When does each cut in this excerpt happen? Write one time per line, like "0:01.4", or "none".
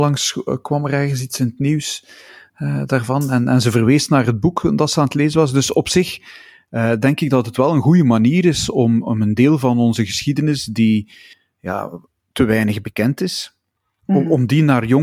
none